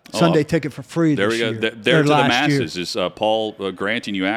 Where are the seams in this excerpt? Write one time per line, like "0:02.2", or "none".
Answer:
none